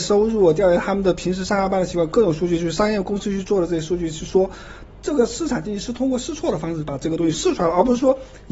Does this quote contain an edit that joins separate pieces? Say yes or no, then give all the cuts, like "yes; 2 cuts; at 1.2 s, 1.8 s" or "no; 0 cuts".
yes; 2 cuts; at 4.9 s, 7.3 s